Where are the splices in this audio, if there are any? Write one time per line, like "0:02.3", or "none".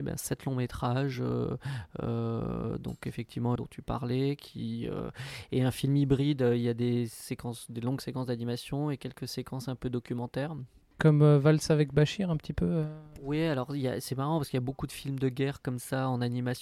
0:03.6